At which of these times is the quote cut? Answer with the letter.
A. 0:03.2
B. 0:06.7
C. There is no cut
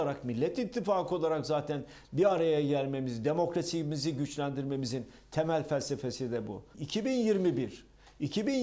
B